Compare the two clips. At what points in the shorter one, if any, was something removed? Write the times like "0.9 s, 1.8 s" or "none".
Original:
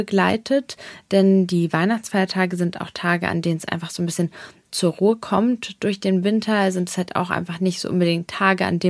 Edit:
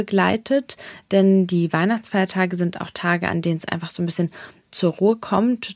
none